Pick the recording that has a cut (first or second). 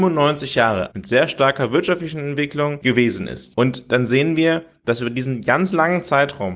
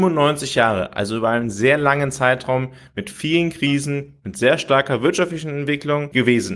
first